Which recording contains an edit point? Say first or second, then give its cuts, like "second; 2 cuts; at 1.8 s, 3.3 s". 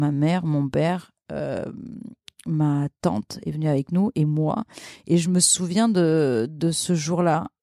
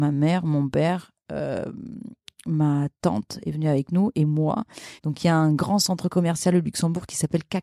second; 1 cut; at 5.0 s